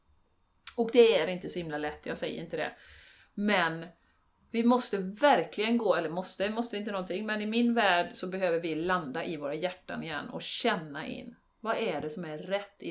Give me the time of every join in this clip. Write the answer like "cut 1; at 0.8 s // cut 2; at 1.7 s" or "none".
none